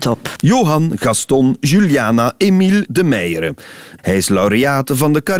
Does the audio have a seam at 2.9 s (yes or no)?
yes